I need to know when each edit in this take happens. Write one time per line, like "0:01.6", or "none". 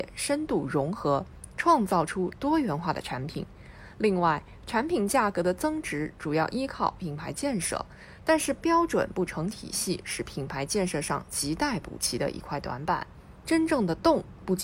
0:13.4